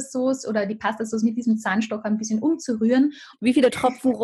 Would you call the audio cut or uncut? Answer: cut